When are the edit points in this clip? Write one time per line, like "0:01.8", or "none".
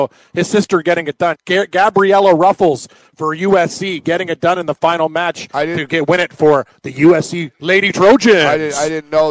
0:01.4